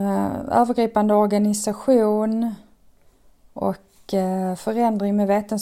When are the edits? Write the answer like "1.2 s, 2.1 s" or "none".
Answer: none